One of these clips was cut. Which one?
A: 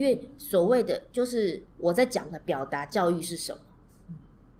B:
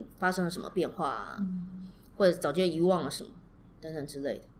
A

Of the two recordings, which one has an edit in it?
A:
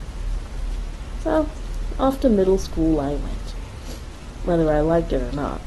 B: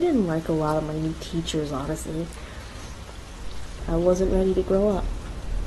B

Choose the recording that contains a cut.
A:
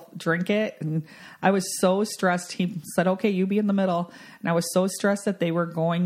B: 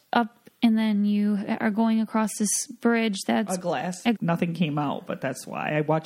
B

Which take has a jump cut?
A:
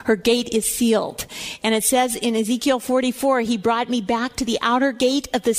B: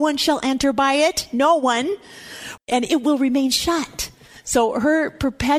B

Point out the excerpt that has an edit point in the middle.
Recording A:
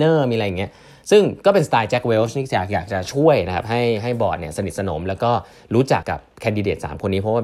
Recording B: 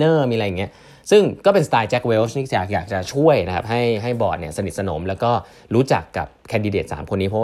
A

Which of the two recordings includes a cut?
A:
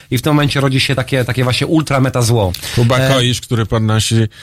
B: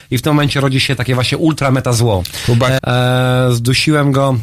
B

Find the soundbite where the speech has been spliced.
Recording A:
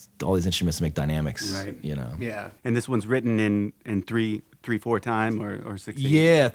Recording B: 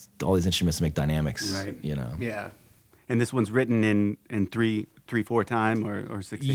A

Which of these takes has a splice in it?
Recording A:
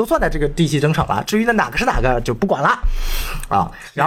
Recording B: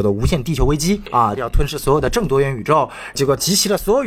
B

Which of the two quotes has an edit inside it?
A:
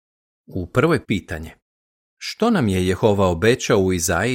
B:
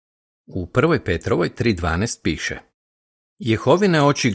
A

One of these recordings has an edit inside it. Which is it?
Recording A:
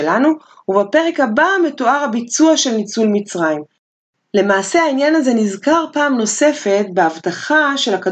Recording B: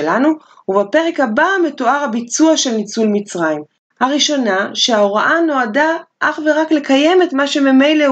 B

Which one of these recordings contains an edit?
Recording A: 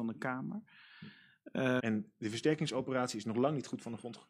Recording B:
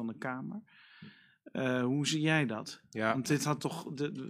A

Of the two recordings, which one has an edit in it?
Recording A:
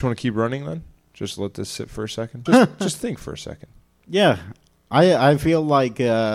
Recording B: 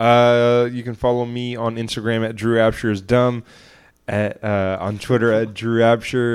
A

